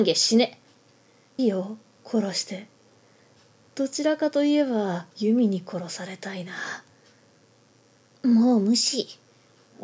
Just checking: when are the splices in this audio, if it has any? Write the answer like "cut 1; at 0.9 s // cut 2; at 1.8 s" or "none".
cut 1; at 1.4 s // cut 2; at 5.1 s